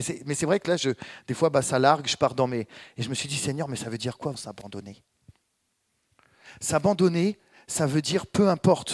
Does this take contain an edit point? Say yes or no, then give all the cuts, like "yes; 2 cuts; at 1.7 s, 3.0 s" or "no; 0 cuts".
yes; 1 cut; at 4.3 s